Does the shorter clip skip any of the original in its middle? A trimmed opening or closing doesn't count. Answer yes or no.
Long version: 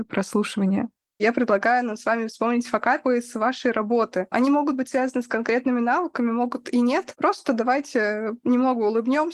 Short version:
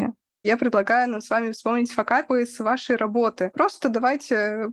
yes